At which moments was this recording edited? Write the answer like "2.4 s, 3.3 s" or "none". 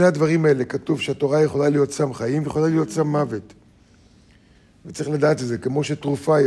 none